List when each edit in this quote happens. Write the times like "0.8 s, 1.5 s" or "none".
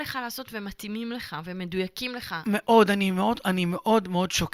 none